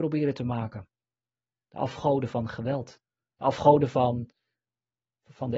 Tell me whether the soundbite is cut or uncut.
uncut